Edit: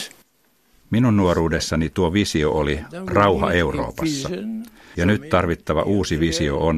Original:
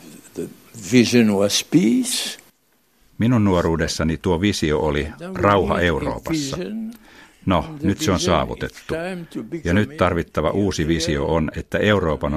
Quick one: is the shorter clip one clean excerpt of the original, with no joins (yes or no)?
no